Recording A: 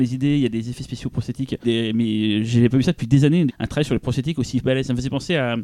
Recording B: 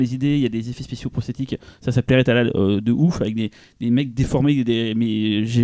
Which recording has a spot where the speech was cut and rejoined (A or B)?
A